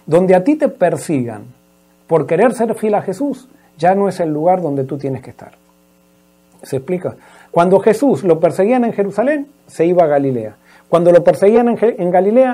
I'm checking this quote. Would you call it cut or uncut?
cut